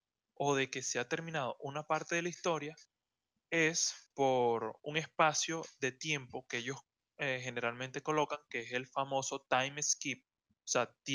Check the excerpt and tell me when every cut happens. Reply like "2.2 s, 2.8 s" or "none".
none